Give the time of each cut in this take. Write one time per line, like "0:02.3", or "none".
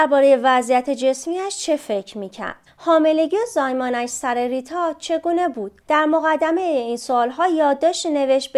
0:02.7
0:05.8